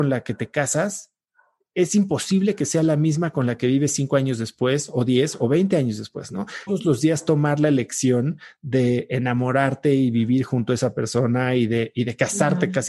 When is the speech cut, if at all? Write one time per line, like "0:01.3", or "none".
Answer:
0:06.7